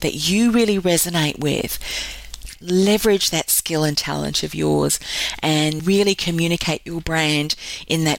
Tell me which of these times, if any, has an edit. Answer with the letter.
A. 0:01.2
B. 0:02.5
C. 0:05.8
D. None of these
B